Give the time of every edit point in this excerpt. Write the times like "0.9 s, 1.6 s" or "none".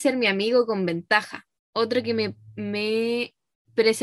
none